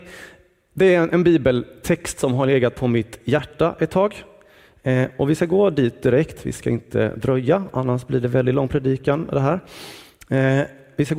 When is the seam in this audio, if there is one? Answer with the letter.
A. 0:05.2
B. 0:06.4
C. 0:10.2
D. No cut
D